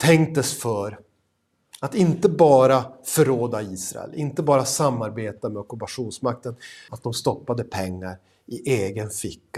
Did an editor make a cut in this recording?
yes; 1 cut; at 6.9 s

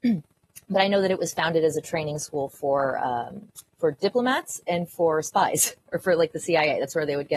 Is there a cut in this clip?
yes; 2 cuts; at 3.7 s, 5.8 s

